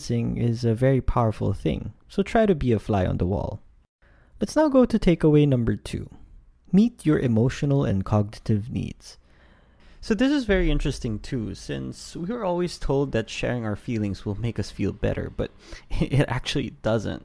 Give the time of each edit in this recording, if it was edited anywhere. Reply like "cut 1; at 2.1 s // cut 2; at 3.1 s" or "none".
none